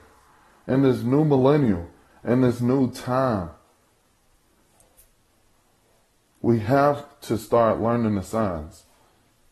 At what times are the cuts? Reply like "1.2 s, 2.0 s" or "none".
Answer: none